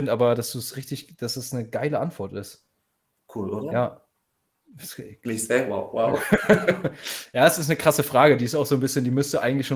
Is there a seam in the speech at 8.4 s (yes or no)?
no